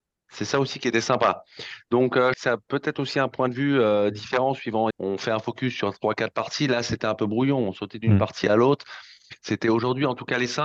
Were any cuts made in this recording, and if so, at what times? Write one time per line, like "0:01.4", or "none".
0:02.3
0:04.9